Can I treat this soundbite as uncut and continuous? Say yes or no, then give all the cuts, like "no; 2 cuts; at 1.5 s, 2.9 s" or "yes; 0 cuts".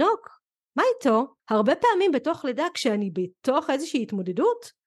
no; 1 cut; at 1.4 s